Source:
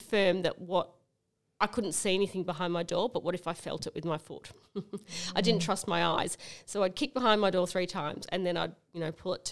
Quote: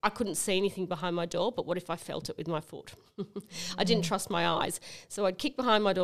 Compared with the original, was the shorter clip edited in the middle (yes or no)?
no